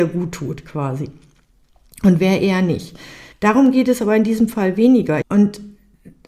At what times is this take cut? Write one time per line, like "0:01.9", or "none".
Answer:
0:03.3
0:05.2